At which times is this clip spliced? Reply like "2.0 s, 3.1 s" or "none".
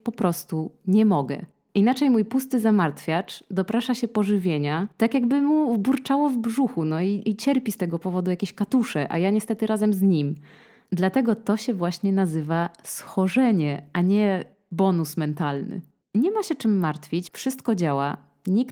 16.0 s, 17.3 s